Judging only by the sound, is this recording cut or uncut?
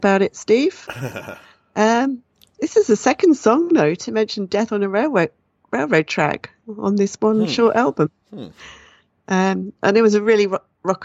uncut